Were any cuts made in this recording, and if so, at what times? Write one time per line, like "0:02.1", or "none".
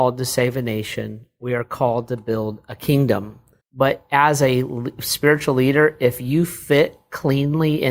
0:03.6